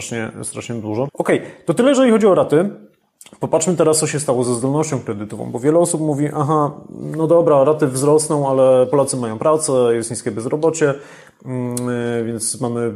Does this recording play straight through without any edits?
no; 1 cut; at 1.1 s

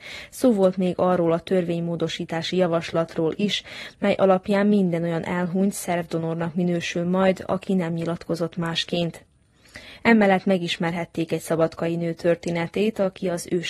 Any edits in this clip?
no; 0 cuts

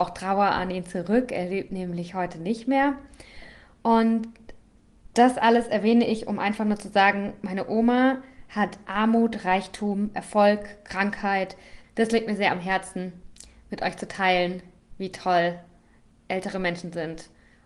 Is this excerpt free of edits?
no; 1 cut; at 11.8 s

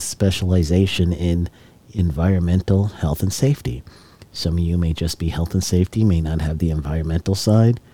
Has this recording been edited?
no; 0 cuts

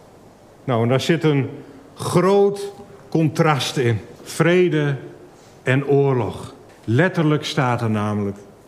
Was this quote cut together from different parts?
yes; 2 cuts; at 4.2 s, 6.7 s

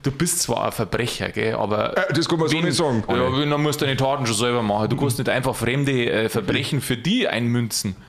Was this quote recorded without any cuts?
no; 1 cut; at 3.1 s

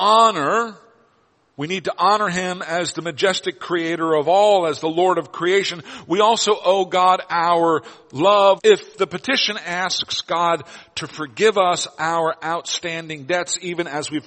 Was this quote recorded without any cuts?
no; 1 cut; at 8.6 s

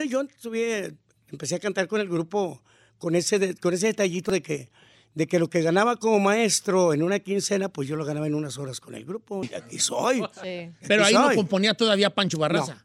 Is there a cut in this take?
yes; 1 cut; at 9.4 s

